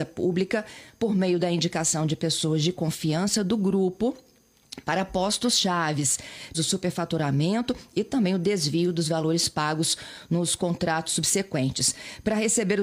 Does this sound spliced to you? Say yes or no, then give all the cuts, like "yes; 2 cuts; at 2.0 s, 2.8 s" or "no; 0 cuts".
yes; 1 cut; at 6.5 s